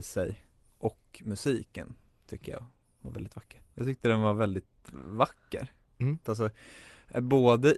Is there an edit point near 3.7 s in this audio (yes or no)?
yes